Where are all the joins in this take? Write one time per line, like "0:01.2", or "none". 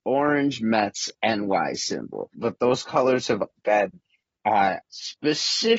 0:02.3
0:03.6
0:04.8